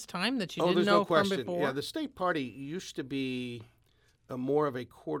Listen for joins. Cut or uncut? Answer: uncut